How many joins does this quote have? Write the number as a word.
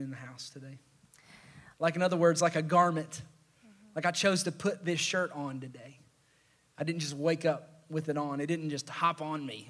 one